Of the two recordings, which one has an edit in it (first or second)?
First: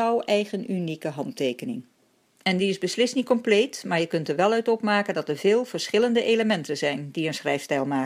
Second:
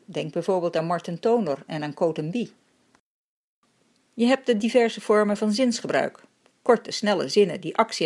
first